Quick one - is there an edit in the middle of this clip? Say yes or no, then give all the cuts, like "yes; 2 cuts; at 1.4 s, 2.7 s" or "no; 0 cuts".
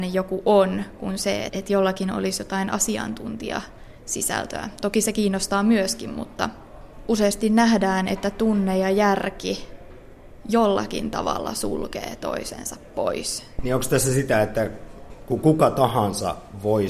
yes; 2 cuts; at 1.5 s, 13.6 s